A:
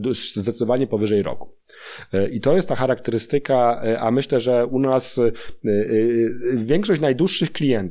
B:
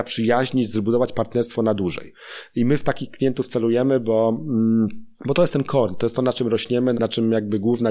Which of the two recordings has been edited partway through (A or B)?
B